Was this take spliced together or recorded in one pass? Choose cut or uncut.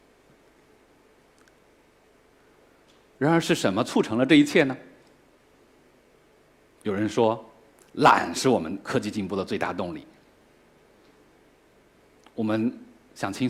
uncut